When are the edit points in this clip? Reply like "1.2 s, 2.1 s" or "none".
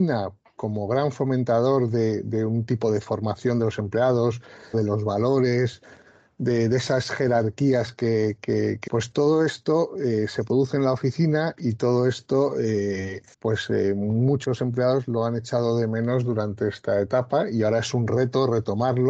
4.7 s, 8.9 s, 13.3 s